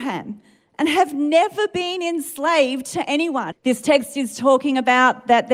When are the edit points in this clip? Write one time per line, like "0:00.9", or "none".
0:03.5

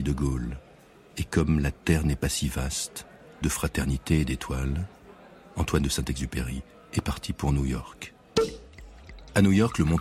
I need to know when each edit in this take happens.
0:03.4

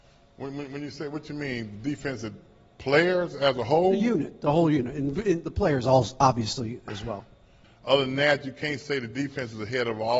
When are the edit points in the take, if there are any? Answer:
0:07.6

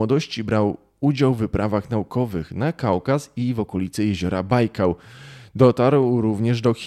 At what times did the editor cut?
none

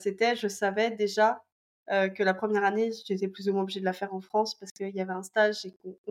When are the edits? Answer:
none

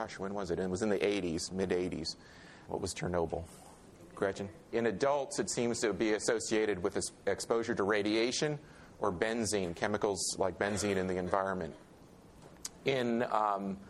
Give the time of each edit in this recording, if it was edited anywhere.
0:02.7
0:04.7

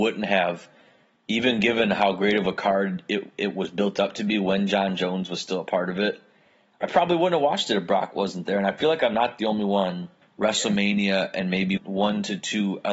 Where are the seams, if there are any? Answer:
0:10.2
0:11.8

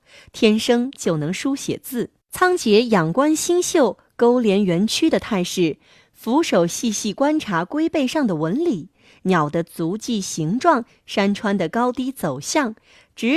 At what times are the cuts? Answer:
0:02.2

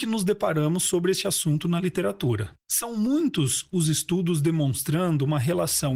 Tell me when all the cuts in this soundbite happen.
0:02.6

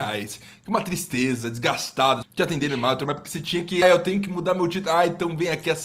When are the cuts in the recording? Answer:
0:02.2
0:03.8

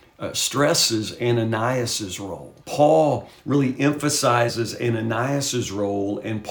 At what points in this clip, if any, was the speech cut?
0:02.6

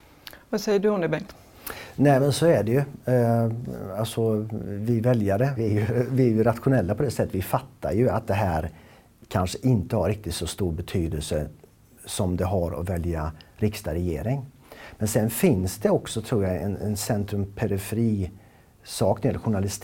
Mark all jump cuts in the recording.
0:05.5

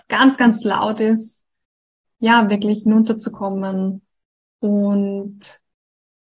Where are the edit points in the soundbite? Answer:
0:02.0

